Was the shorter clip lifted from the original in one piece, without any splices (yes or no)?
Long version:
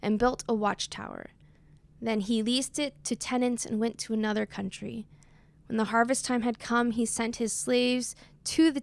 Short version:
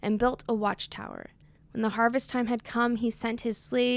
no